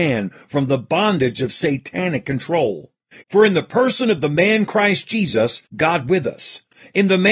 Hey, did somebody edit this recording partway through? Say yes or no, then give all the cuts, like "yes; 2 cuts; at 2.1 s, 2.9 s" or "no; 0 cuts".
yes; 2 cuts; at 3.2 s, 5.7 s